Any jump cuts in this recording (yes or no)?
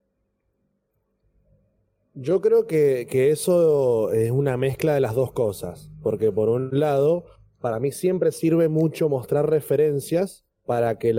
no